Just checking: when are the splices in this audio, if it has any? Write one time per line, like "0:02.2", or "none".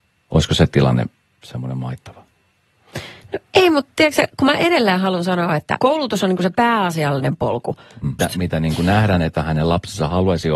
0:05.8
0:08.2